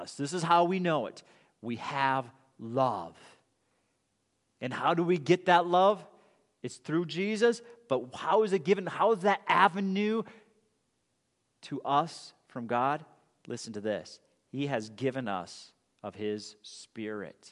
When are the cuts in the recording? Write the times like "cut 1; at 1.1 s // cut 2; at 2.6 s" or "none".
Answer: none